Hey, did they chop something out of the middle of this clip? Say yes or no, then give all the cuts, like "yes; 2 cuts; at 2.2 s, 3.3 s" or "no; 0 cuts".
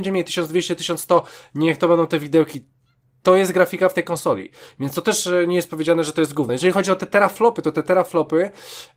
no; 0 cuts